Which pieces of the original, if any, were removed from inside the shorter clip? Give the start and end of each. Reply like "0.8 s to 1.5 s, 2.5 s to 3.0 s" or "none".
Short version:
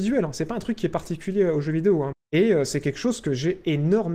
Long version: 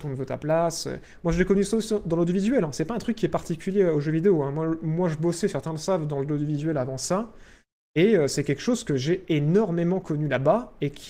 4.5 s to 7.8 s